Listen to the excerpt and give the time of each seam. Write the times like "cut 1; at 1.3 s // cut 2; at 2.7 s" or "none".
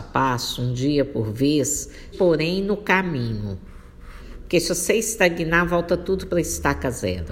cut 1; at 2.1 s